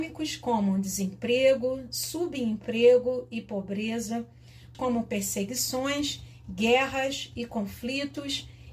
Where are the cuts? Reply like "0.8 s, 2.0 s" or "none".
4.7 s